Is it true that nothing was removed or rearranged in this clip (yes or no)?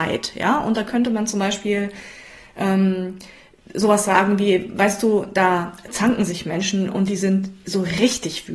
yes